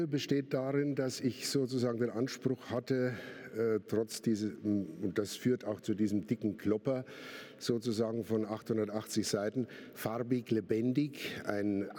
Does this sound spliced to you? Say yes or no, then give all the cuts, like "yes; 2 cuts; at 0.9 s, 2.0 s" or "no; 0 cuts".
no; 0 cuts